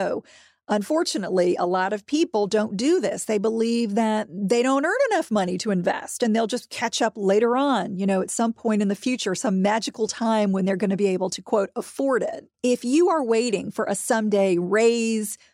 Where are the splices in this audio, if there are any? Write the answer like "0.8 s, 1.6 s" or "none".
12.5 s